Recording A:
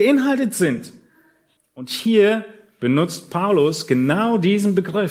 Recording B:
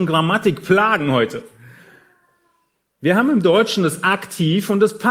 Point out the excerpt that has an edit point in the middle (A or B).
A